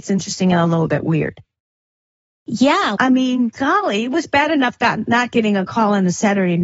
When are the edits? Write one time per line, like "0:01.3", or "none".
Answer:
0:03.0